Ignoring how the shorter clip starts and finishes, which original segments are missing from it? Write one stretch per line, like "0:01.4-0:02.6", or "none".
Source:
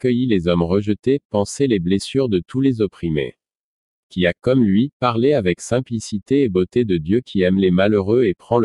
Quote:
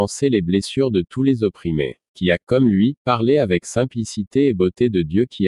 0:03.4-0:04.0